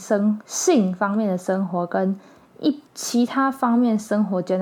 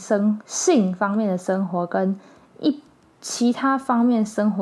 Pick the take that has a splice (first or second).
first